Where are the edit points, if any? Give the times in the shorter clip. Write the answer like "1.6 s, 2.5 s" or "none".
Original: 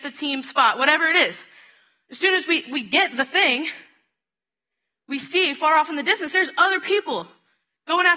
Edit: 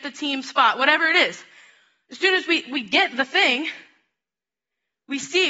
none

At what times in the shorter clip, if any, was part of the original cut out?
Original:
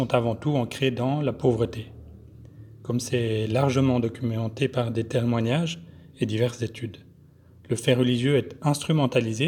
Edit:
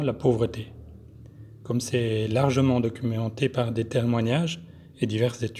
none

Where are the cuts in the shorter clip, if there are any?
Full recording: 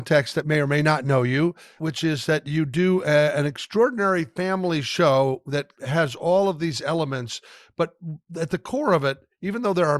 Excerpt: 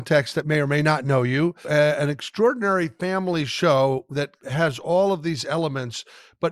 1.6 s

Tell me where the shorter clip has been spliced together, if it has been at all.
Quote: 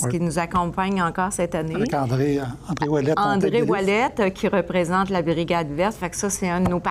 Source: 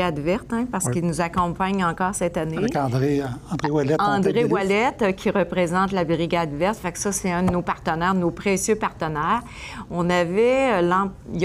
none

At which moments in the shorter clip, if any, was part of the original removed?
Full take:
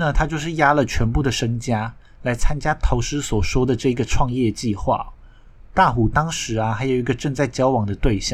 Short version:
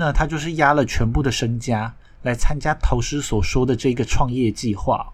none

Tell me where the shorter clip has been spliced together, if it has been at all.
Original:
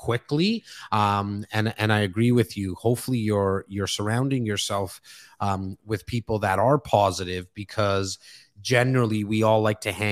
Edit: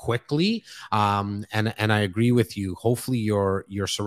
none

